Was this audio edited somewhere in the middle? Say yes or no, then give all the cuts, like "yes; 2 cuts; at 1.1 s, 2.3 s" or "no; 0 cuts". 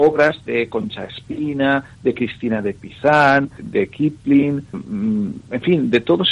yes; 2 cuts; at 3.6 s, 4.7 s